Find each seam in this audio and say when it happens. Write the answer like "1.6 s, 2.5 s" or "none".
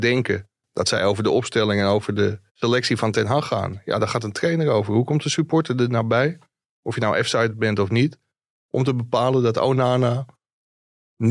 2.5 s